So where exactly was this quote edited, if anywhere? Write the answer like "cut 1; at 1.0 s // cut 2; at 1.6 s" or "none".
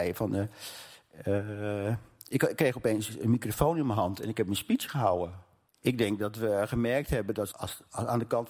cut 1; at 5.7 s // cut 2; at 7.5 s